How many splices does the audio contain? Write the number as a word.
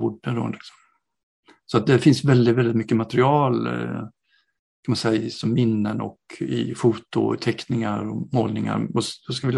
zero